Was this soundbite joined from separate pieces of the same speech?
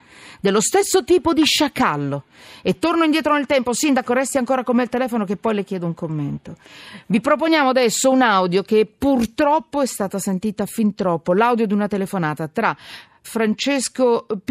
yes; 1 cut; at 13.2 s

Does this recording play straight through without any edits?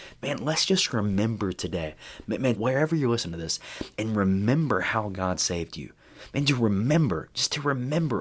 no; 1 cut; at 2.6 s

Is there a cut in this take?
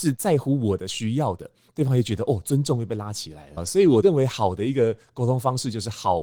yes; 1 cut; at 3.6 s

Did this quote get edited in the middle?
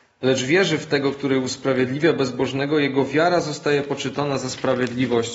no; 0 cuts

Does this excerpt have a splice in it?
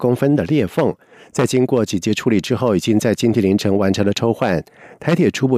no; 0 cuts

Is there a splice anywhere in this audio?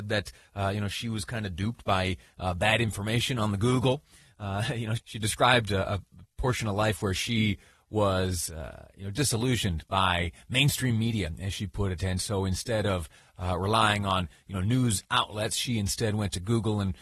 yes; 1 cut; at 5.0 s

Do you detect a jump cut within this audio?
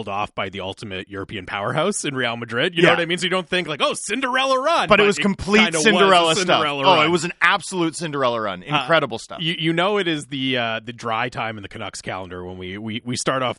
no; 0 cuts

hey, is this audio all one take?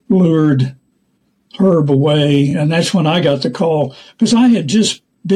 yes; 0 cuts

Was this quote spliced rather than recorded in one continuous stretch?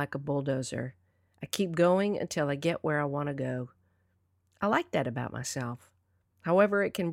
no; 0 cuts

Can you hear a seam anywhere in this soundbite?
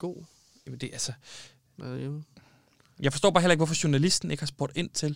no; 0 cuts

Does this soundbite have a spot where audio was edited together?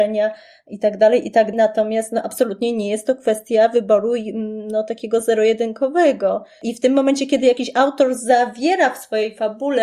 yes; 1 cut; at 1.5 s

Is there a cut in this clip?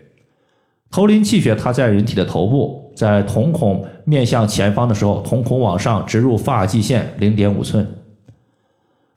no; 0 cuts

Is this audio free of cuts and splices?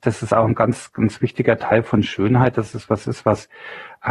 yes; 0 cuts

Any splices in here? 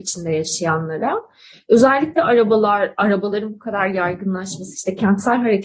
no; 0 cuts

